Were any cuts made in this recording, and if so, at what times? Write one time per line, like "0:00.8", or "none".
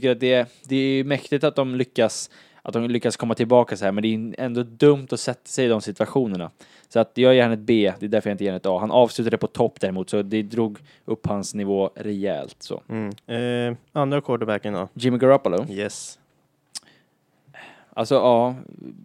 0:13.2